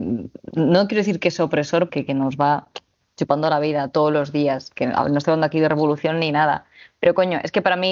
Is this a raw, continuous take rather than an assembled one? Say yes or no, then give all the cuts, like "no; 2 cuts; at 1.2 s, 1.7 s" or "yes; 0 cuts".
no; 1 cut; at 1.9 s